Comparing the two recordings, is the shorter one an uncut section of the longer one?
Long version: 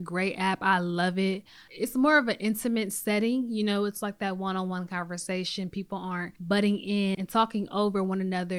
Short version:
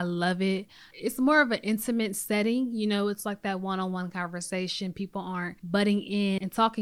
yes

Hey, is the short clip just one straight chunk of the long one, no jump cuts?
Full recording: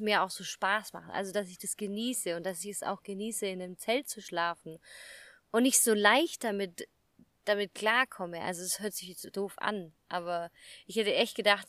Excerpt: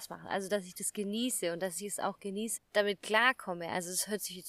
no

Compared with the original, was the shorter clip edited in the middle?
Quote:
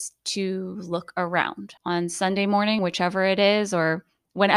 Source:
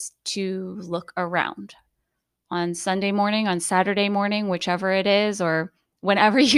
yes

